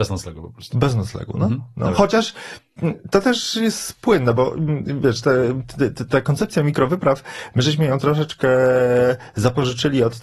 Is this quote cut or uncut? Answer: uncut